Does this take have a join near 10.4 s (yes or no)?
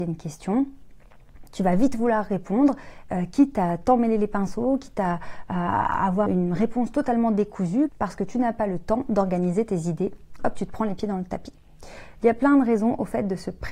yes